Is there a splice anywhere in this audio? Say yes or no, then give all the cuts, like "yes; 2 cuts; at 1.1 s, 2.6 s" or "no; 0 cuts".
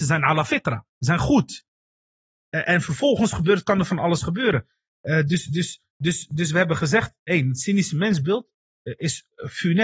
no; 0 cuts